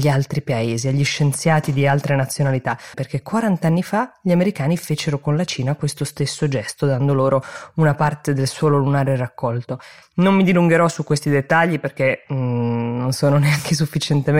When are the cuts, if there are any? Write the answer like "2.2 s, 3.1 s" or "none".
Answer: 2.9 s, 10.0 s